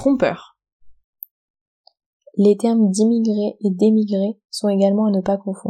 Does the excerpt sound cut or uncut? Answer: uncut